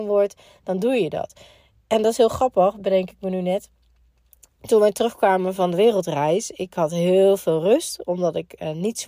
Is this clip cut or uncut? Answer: uncut